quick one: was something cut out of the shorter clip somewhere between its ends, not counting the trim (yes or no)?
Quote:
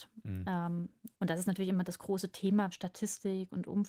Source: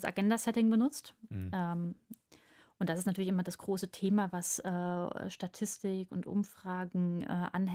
yes